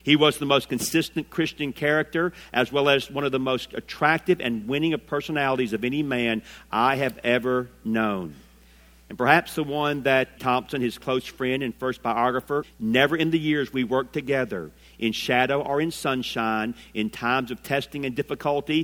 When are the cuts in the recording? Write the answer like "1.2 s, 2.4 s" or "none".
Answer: 10.4 s, 12.6 s